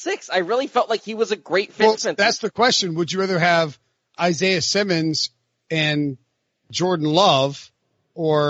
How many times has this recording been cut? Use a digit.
1